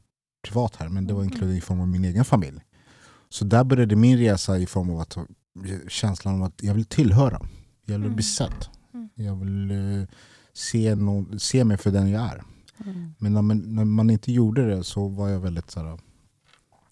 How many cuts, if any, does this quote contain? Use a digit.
0